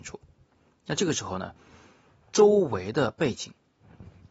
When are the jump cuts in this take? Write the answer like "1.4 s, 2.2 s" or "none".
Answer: none